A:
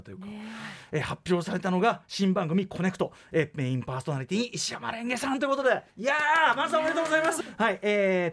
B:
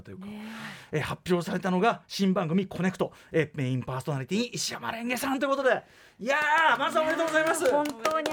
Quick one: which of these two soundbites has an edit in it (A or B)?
A